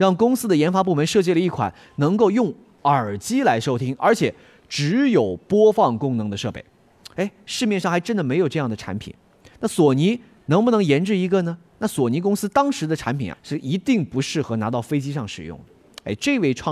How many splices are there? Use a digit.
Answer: 2